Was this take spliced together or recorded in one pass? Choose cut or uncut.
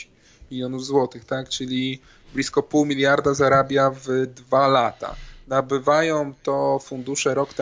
uncut